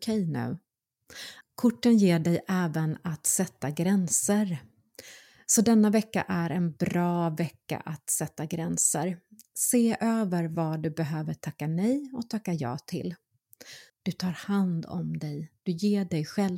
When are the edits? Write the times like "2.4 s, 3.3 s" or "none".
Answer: 1.4 s, 13.9 s